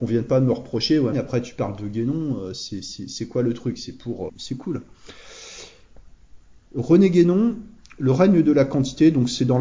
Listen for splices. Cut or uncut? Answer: cut